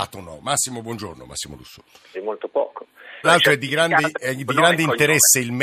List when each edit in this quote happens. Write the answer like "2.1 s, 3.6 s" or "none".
2.1 s, 3.2 s